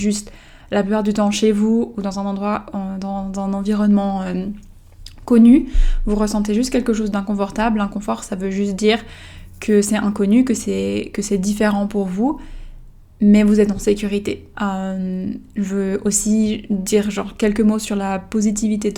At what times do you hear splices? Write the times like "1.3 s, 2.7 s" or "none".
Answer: 14.5 s